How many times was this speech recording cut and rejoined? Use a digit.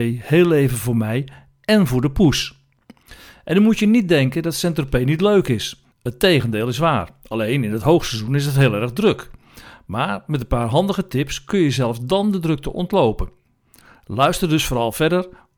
1